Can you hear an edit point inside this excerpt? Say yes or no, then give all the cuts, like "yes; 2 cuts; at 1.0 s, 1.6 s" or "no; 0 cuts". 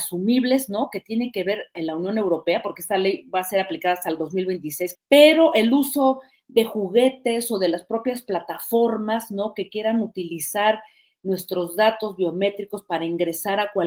yes; 2 cuts; at 1.8 s, 4.9 s